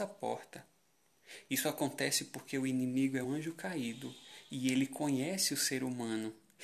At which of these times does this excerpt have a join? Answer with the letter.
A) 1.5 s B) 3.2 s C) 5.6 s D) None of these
B